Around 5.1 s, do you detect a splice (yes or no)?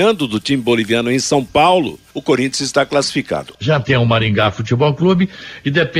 no